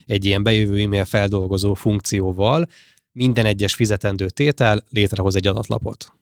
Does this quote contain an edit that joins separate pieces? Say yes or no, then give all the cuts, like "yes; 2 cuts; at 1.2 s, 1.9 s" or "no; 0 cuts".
no; 0 cuts